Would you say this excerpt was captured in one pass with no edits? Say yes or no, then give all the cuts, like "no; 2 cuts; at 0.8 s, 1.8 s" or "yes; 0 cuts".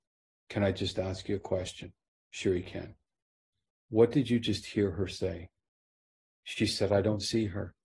yes; 0 cuts